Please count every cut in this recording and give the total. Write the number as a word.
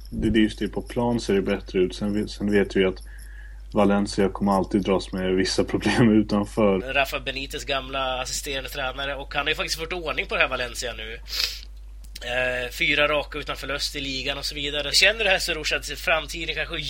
two